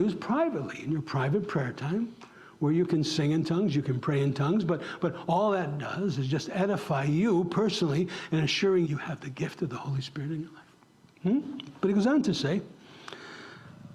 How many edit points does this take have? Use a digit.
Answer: 1